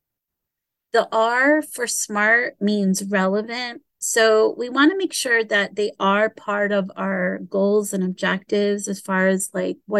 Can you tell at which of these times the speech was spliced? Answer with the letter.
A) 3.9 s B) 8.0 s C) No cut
A